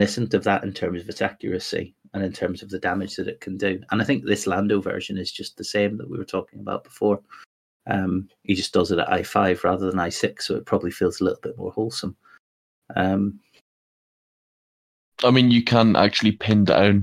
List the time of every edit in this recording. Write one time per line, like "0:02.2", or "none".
none